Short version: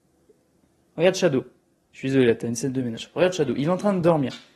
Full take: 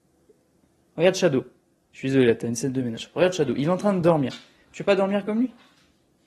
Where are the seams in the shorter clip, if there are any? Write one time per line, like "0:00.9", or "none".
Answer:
none